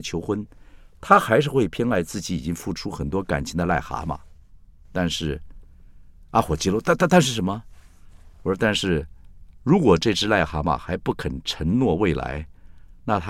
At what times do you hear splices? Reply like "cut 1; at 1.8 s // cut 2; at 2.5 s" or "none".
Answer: none